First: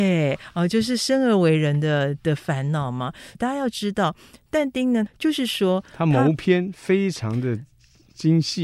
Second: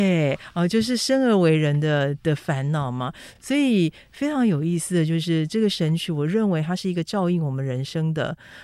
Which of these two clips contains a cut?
first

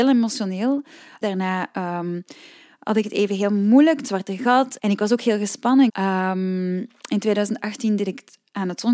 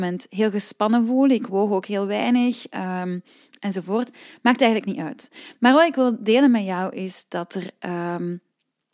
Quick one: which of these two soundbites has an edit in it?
first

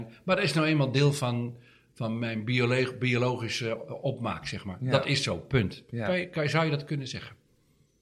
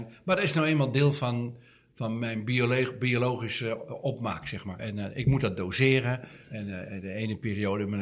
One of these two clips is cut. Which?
second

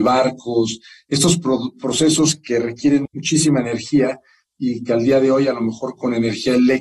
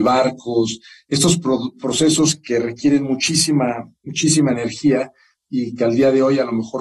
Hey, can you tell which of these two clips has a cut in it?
first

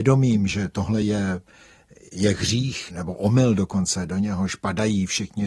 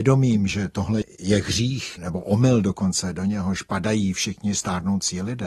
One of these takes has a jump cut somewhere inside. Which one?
second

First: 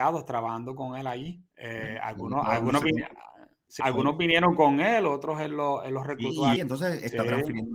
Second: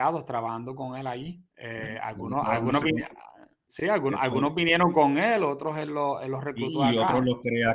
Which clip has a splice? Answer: first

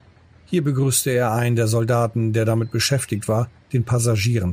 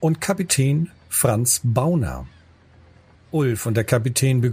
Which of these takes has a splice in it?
second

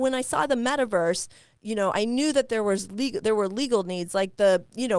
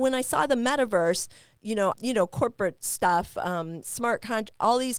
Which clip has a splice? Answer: second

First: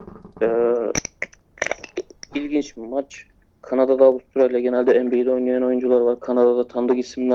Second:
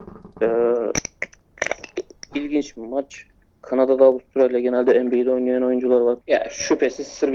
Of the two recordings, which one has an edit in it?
second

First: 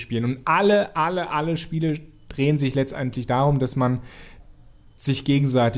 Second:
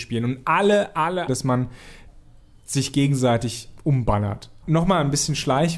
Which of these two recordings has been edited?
second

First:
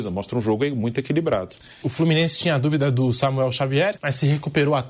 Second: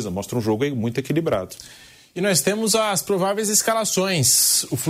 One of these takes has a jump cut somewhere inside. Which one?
first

